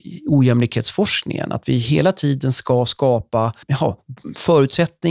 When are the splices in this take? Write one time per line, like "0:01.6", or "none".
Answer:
0:03.6